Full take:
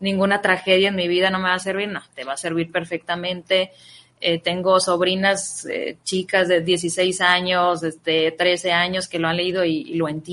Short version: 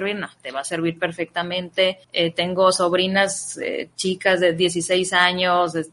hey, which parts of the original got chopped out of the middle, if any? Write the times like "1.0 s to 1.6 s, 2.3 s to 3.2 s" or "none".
3.8 s to 4.1 s